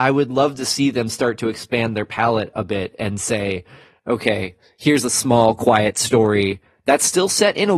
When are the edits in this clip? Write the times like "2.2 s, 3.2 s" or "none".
none

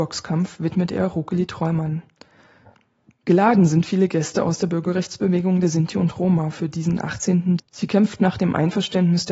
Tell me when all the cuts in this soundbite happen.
7.6 s

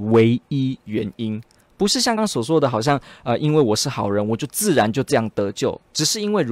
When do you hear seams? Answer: 2.2 s

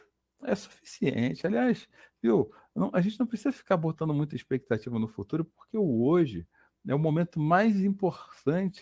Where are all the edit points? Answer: none

